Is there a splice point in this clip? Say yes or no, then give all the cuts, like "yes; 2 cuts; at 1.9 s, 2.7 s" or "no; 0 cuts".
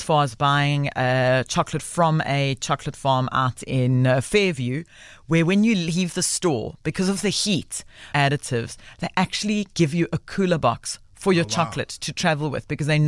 yes; 1 cut; at 8.1 s